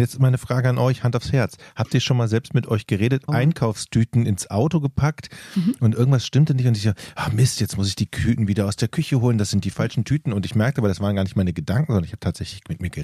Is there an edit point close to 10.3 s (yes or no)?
no